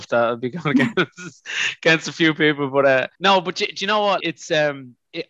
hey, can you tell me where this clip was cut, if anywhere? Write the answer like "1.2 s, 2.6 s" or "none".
3.1 s, 4.2 s